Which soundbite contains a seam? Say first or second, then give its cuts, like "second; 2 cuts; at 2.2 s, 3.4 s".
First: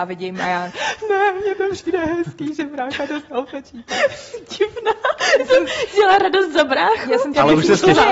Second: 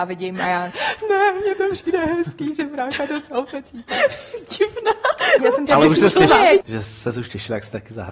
second; 2 cuts; at 5.4 s, 6.6 s